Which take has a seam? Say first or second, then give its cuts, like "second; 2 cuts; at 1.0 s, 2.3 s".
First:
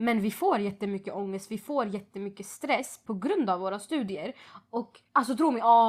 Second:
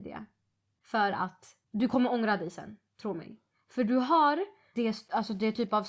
second; 1 cut; at 4.7 s